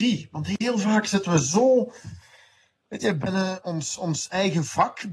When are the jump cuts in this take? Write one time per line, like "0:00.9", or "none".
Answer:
0:03.2